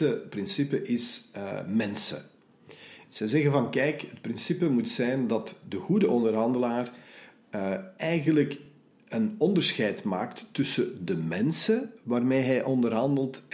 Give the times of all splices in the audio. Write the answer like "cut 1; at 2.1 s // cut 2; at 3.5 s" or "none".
none